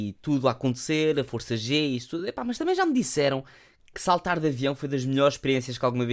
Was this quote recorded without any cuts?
yes; 0 cuts

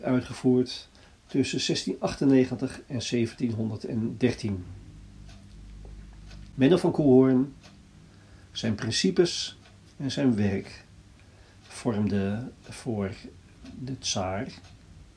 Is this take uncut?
yes; 0 cuts

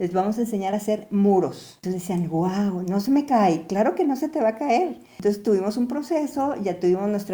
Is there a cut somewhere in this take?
no; 0 cuts

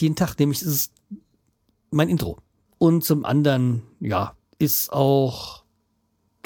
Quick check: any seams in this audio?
yes; 1 cut; at 2.7 s

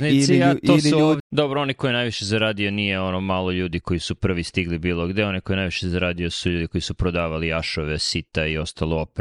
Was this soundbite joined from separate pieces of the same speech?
yes; 1 cut; at 1.2 s

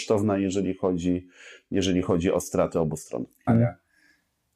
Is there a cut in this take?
yes; 1 cut; at 3.5 s

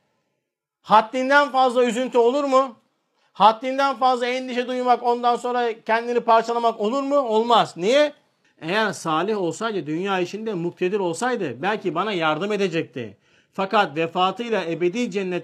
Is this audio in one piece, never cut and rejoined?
no; 1 cut; at 8.4 s

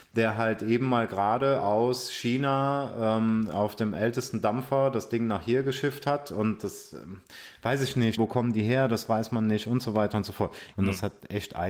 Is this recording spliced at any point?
yes; 2 cuts; at 8.2 s, 10.7 s

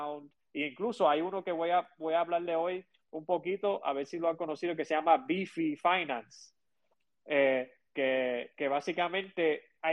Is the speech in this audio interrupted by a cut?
no; 0 cuts

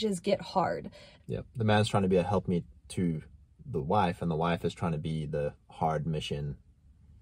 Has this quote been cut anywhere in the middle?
yes; 1 cut; at 1.2 s

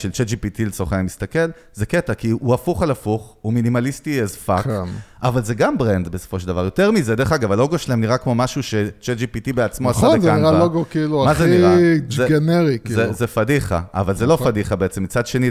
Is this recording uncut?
yes; 0 cuts

